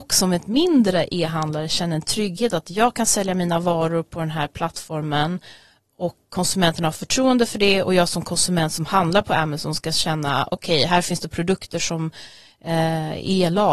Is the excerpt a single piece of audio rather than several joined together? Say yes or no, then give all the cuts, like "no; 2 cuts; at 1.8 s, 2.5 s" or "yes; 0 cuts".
yes; 0 cuts